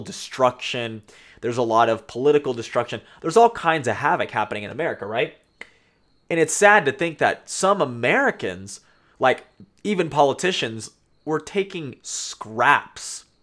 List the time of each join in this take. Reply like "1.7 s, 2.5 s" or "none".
none